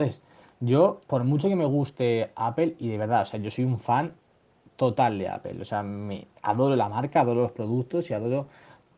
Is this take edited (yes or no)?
yes